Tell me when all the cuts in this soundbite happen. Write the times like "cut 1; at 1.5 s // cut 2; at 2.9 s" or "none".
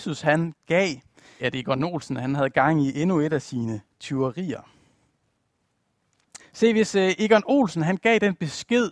cut 1; at 1.4 s // cut 2; at 6.4 s